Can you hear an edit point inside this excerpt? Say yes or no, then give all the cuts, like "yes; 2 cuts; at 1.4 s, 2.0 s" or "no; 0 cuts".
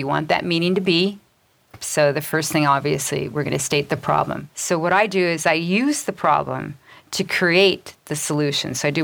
yes; 2 cuts; at 1.8 s, 4.5 s